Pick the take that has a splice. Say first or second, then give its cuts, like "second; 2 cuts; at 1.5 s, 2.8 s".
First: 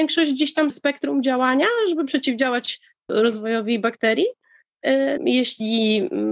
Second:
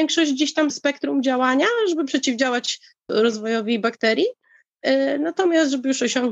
first; 1 cut; at 5.2 s